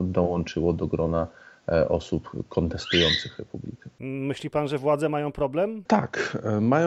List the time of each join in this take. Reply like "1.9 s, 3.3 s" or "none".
none